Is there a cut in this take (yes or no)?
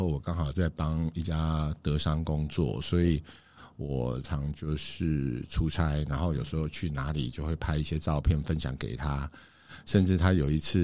yes